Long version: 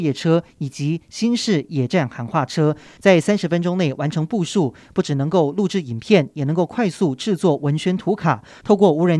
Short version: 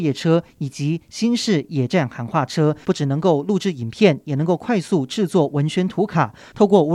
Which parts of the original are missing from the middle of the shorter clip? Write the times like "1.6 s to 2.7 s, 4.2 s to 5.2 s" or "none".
2.8 s to 4.9 s